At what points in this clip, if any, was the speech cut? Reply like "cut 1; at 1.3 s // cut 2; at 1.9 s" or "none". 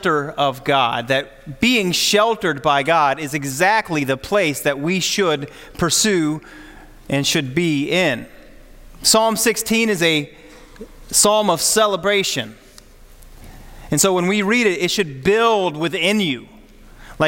none

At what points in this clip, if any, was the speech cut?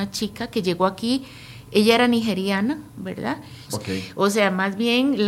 cut 1; at 3.7 s

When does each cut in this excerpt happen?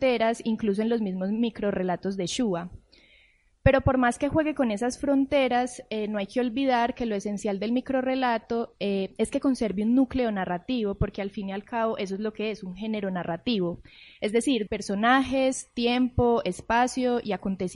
cut 1; at 14.7 s

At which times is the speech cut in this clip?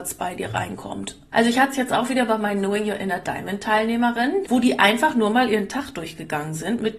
cut 1; at 1.3 s // cut 2; at 4.4 s

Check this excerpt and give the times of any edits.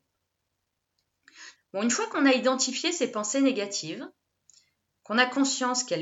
cut 1; at 1.6 s

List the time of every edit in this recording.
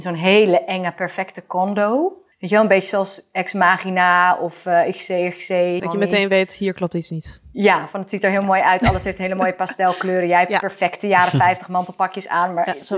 cut 1; at 2.3 s // cut 2; at 5.8 s

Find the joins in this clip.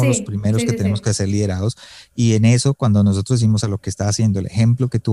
cut 1; at 3.6 s

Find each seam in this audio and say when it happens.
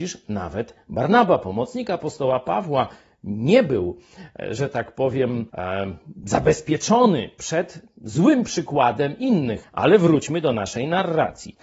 cut 1; at 5.5 s // cut 2; at 9.6 s

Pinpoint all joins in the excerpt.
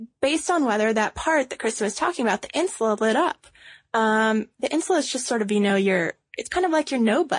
none

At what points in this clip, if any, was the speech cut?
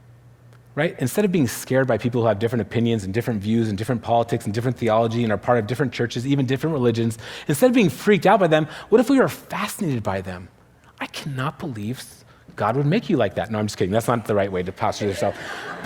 none

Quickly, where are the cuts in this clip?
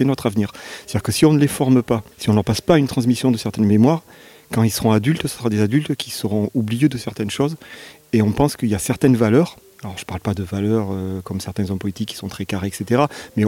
cut 1; at 2.1 s

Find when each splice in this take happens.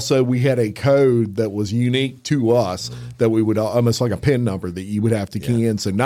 none

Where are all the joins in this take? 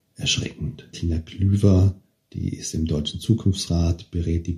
cut 1; at 0.9 s

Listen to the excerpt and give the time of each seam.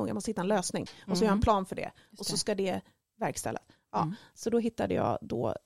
none

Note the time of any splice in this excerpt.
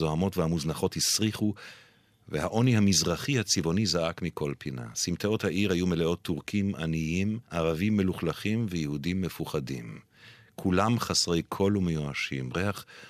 cut 1; at 7.4 s

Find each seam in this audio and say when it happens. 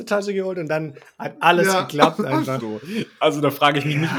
cut 1; at 2.6 s

